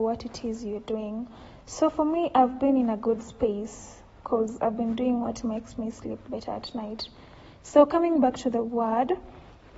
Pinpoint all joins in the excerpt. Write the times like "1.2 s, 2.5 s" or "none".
none